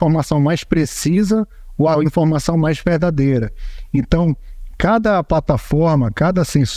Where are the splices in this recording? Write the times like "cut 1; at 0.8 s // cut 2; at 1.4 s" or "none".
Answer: none